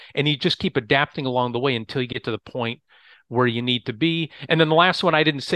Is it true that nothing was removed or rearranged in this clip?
yes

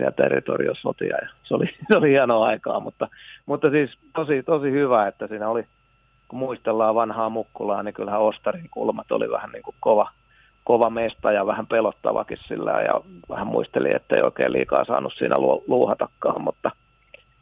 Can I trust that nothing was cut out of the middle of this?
yes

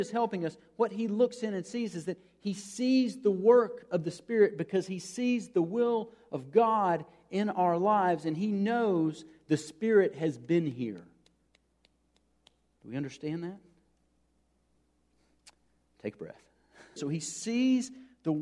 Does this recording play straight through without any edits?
no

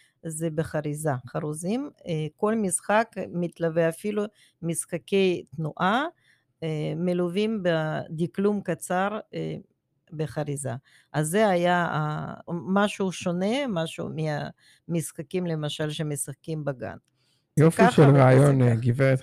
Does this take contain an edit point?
yes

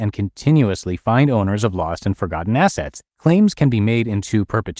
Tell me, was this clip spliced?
yes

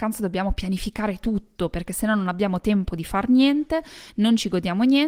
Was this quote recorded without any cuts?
yes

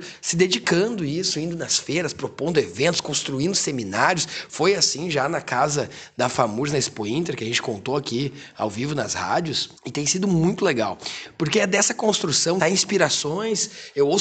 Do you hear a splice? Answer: yes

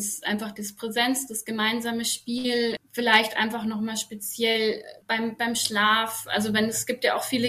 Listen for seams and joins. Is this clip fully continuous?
yes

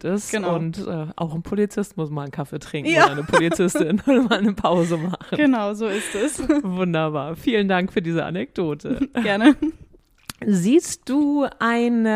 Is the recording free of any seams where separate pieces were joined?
yes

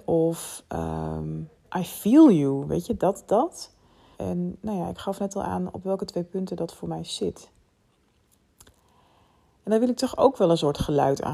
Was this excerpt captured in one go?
no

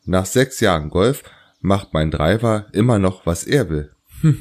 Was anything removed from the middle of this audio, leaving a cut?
no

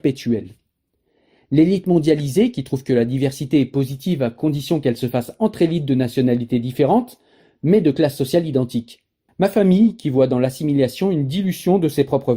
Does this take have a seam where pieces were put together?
yes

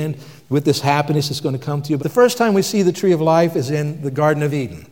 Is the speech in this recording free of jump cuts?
no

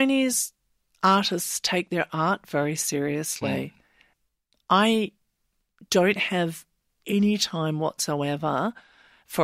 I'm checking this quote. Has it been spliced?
no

